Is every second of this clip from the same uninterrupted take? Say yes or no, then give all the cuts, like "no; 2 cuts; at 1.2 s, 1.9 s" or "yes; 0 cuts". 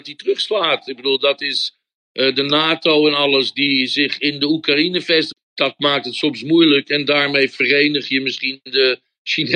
no; 1 cut; at 5.3 s